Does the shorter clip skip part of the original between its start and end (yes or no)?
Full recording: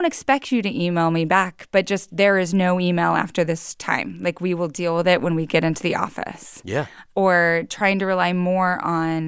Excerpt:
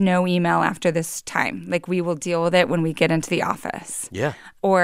no